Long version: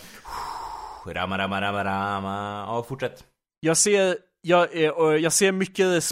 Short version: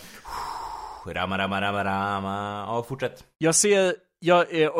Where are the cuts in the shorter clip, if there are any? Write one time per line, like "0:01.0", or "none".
0:03.3